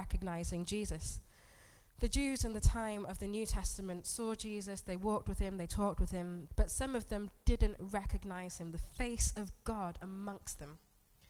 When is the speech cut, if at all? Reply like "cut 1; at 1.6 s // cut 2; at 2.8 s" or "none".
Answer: cut 1; at 6.5 s